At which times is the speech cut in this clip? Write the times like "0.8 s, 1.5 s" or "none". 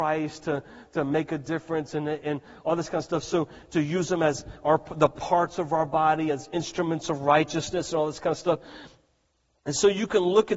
none